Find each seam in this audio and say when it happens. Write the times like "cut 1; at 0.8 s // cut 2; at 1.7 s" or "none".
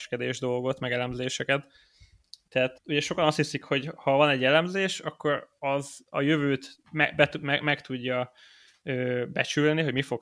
cut 1; at 2.7 s // cut 2; at 6.8 s